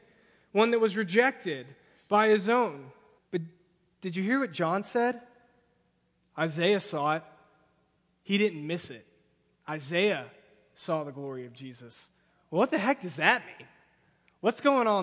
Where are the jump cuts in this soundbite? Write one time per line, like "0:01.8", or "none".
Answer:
0:03.2

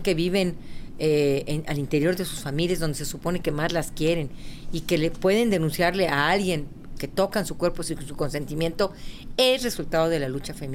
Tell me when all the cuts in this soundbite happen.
none

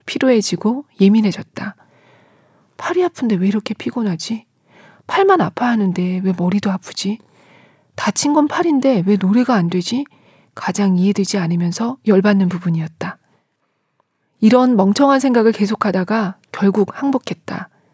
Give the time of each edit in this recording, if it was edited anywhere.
none

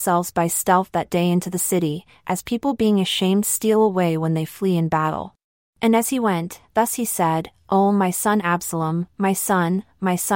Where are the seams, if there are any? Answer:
0:05.7

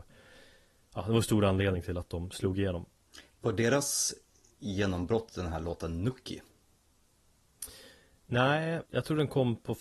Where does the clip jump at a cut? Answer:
0:08.9

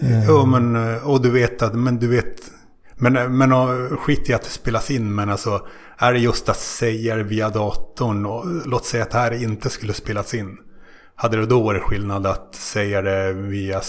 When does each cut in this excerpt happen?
none

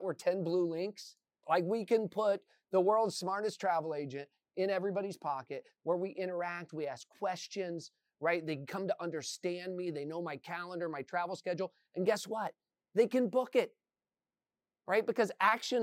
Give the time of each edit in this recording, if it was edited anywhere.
0:01.4

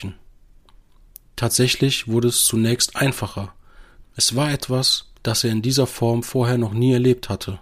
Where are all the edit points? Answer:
0:04.0
0:05.2

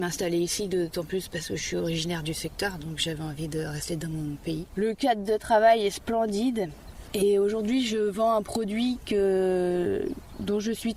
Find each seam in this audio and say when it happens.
none

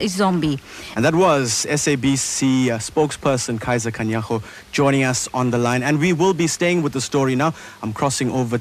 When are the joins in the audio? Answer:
0:01.0

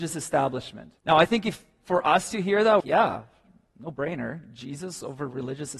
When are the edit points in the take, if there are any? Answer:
0:01.0
0:02.8

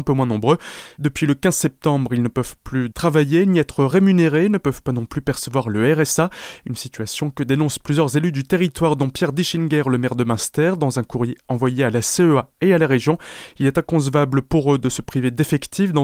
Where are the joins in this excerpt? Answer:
0:02.9

